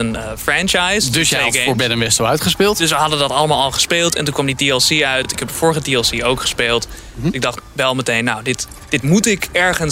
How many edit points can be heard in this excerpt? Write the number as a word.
zero